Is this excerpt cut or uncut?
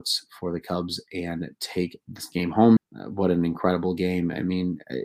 cut